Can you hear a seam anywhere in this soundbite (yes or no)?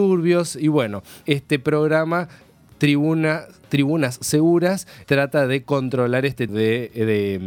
yes